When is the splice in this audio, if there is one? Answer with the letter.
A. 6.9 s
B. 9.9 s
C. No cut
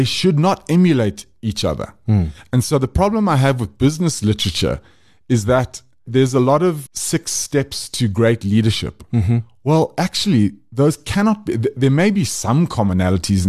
A